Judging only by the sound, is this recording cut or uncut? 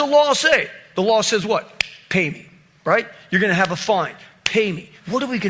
uncut